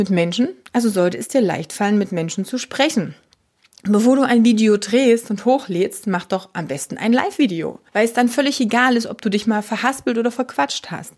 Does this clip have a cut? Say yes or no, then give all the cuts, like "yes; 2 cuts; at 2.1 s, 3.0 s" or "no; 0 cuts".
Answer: yes; 1 cut; at 7.9 s